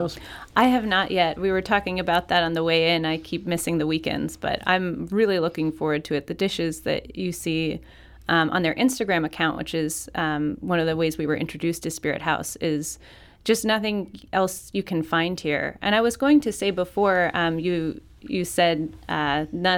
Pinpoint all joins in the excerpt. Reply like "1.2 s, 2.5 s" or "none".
none